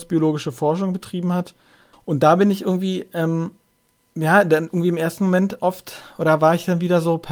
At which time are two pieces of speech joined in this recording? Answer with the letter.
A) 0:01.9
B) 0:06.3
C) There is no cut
A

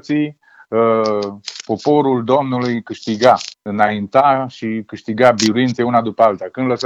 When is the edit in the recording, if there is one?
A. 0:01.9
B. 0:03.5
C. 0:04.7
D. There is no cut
B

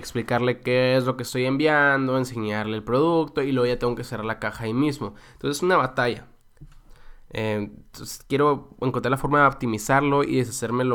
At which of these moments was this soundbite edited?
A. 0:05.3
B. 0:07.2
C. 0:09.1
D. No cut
D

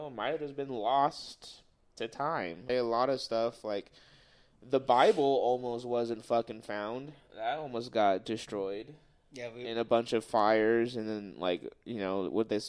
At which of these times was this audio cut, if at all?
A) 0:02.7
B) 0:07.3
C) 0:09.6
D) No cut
A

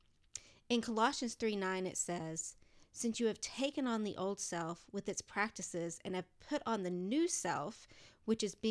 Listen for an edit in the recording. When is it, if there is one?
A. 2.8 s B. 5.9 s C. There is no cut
A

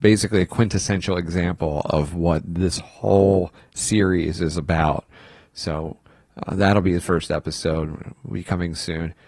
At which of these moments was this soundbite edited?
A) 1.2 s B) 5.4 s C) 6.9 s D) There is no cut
D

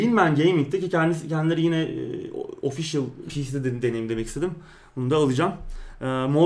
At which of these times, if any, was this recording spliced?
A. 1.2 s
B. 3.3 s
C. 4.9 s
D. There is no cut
B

